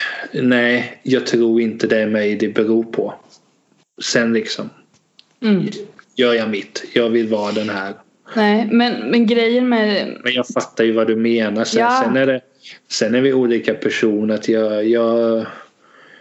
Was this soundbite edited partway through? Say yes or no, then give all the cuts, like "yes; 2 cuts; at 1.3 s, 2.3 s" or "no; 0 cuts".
no; 0 cuts